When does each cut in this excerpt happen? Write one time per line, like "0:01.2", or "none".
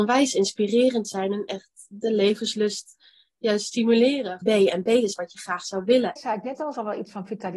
0:04.4
0:06.2